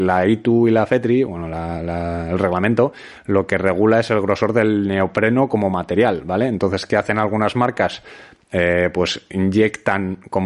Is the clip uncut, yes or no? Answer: yes